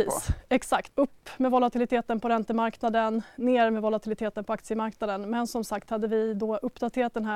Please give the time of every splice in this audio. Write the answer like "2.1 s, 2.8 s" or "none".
0.9 s

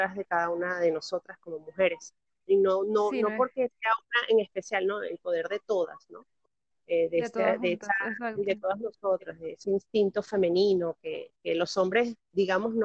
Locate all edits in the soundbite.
none

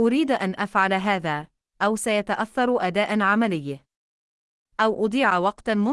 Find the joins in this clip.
1.6 s

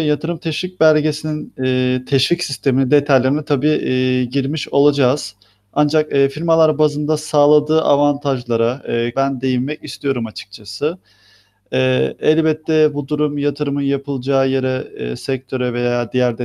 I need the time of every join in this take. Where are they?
9.1 s

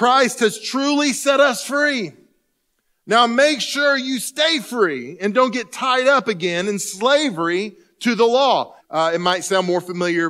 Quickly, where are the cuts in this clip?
8.8 s

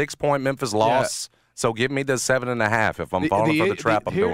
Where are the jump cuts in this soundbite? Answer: none

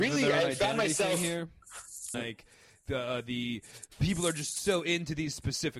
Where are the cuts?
2.1 s

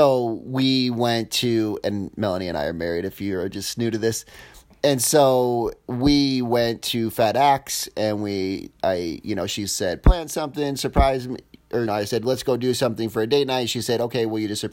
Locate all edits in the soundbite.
11.9 s

